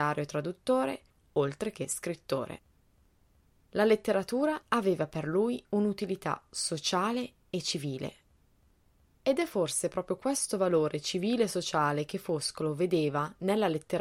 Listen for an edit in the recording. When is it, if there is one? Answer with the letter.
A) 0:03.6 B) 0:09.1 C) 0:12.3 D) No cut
B